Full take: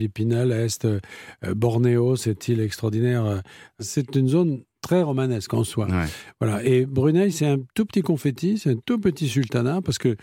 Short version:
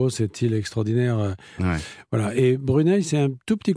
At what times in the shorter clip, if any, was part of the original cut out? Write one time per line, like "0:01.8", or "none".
0:01.6